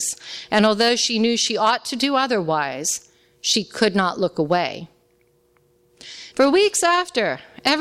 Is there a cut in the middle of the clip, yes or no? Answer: yes